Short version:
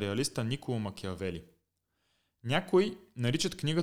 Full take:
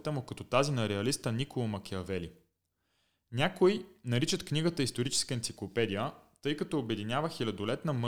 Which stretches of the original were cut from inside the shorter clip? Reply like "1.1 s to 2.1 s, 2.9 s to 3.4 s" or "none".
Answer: none